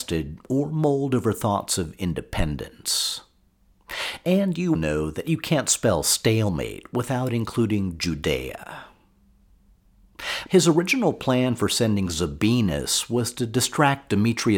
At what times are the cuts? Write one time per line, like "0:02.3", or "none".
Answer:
0:04.8
0:10.5

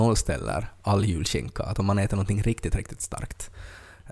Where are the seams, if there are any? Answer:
none

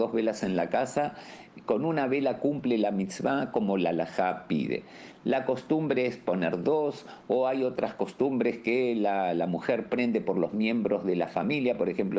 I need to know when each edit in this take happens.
none

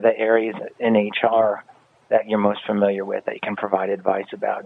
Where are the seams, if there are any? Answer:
none

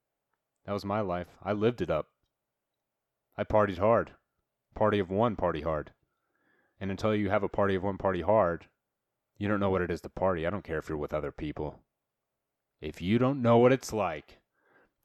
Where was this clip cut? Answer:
none

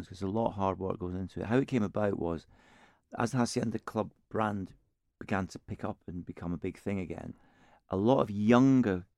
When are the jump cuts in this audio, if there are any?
none

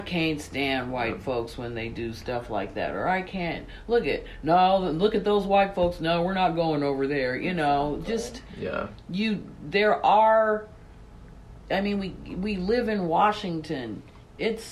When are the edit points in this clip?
none

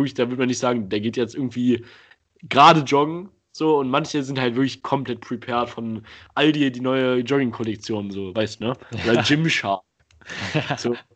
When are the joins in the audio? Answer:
none

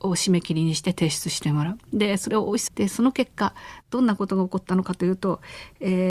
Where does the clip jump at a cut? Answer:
0:02.7

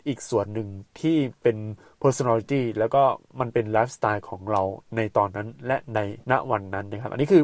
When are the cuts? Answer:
0:06.2

